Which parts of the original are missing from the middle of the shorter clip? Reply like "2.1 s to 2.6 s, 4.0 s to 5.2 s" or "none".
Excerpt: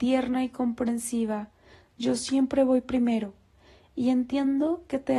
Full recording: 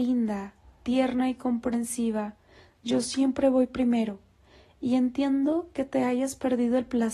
none